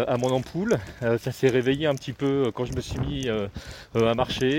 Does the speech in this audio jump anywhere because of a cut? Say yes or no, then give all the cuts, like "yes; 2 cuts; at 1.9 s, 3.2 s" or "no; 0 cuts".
no; 0 cuts